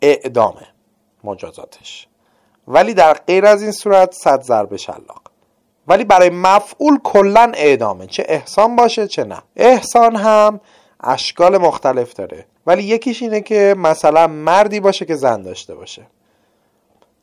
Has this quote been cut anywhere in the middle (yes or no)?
yes